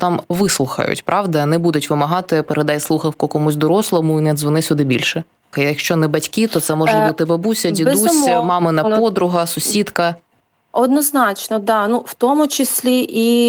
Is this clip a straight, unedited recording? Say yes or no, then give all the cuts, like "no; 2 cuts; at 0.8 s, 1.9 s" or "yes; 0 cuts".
no; 1 cut; at 5.5 s